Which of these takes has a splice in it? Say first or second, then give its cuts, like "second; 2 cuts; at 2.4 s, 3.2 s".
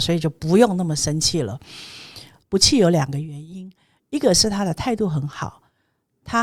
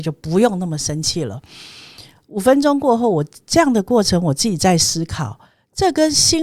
first; 1 cut; at 2.4 s